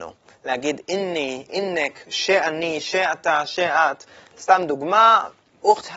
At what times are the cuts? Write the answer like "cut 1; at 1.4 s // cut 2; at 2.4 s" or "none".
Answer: cut 1; at 1.5 s